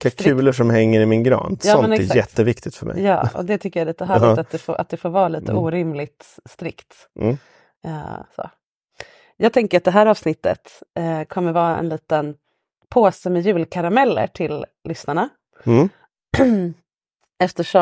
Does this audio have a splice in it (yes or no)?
no